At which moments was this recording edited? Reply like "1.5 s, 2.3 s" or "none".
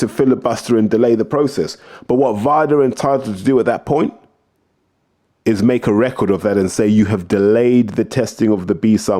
none